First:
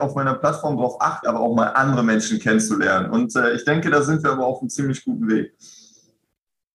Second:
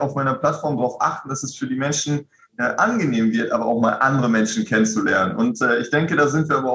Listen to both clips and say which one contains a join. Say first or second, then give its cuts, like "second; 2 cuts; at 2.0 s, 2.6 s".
first; 1 cut; at 1.2 s